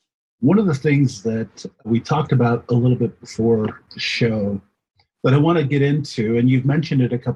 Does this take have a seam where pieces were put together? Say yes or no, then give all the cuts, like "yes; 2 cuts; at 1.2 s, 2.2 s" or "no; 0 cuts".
no; 0 cuts